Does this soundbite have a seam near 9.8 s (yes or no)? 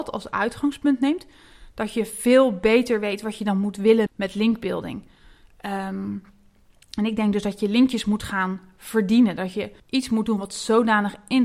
yes